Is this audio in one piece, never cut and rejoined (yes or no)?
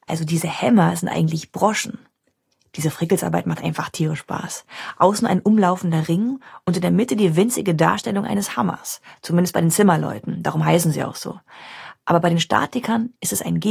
yes